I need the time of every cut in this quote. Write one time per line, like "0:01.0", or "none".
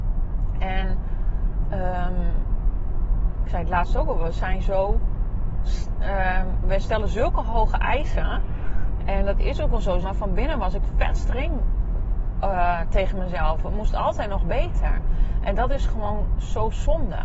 0:09.0
0:10.0